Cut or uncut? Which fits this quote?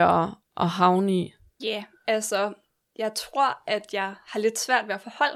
cut